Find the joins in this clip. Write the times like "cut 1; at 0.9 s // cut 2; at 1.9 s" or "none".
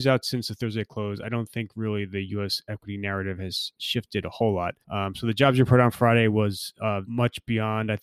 cut 1; at 4.8 s // cut 2; at 7.0 s